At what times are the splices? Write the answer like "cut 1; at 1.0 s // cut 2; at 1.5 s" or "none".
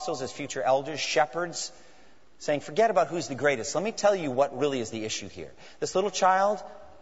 none